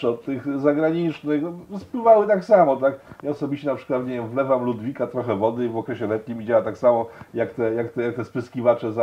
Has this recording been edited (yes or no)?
no